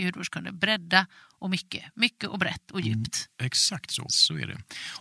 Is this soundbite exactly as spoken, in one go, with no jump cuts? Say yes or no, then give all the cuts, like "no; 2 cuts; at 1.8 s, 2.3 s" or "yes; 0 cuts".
no; 1 cut; at 4.1 s